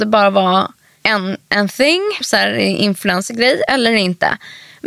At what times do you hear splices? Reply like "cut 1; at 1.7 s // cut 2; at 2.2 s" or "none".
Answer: cut 1; at 2.2 s